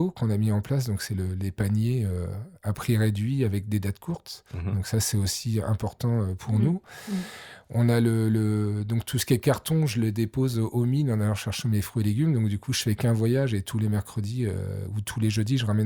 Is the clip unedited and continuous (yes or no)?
yes